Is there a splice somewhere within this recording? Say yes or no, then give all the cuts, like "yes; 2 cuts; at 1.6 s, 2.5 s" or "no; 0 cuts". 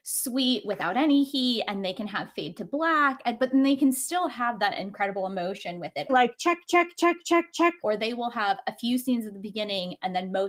yes; 2 cuts; at 6.1 s, 7.8 s